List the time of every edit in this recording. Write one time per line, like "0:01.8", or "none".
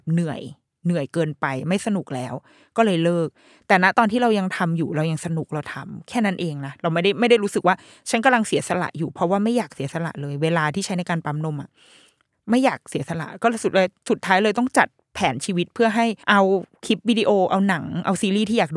0:16.2